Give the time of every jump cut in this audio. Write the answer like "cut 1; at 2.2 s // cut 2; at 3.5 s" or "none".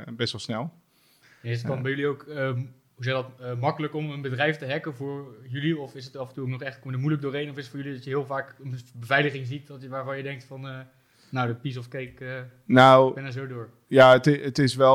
none